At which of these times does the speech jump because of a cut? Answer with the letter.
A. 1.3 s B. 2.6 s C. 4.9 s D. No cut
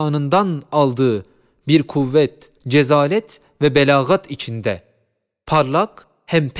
B